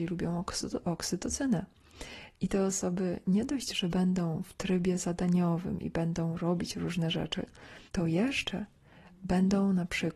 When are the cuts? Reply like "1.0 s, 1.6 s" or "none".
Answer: 2.4 s, 7.9 s